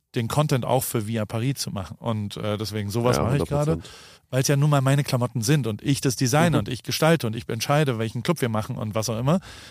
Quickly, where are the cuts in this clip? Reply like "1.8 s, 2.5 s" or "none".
2.0 s, 4.1 s